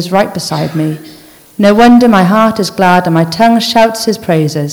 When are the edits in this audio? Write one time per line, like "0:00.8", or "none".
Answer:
none